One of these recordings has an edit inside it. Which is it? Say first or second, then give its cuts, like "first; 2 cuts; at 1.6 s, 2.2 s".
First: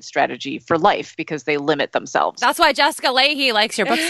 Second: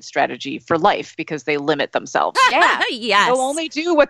second; 1 cut; at 2.3 s